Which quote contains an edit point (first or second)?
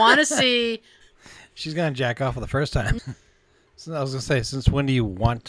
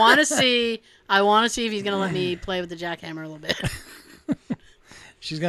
first